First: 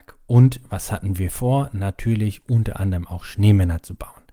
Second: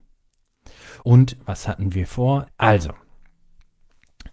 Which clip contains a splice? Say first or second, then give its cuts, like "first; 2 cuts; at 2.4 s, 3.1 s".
second; 2 cuts; at 1.0 s, 2.5 s